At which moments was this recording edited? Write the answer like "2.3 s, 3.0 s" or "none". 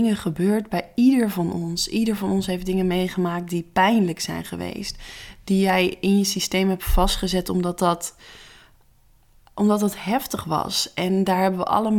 none